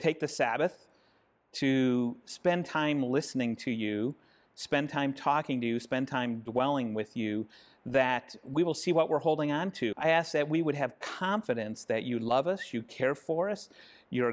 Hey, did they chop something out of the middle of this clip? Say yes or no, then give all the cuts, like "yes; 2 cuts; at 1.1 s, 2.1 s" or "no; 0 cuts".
yes; 1 cut; at 9.9 s